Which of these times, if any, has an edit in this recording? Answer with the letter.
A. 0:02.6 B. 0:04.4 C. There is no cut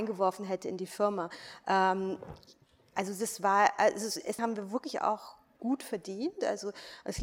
B